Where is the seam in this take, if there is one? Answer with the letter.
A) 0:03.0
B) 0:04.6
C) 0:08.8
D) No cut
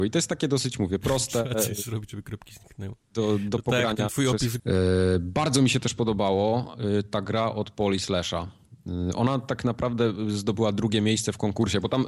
B